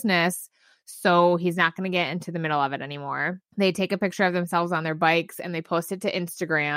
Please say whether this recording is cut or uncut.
cut